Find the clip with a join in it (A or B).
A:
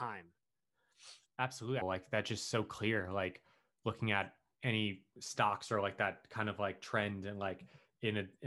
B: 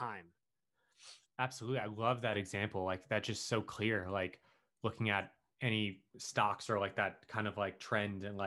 A